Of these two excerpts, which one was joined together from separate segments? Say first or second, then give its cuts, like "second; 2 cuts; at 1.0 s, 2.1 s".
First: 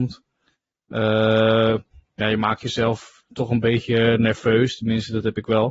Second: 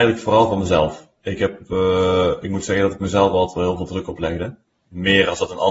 second; 1 cut; at 4.7 s